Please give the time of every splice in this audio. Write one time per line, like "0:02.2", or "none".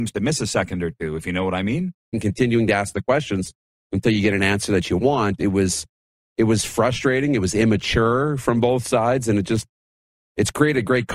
0:02.1